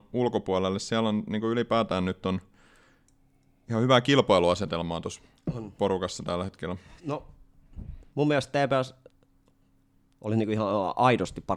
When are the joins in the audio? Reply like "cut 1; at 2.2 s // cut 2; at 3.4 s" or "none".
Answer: cut 1; at 7.0 s // cut 2; at 8.1 s